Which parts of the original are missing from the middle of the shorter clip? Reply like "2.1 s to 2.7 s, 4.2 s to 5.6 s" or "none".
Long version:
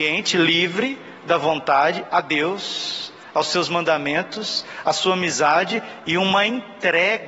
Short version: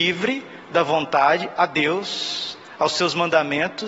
none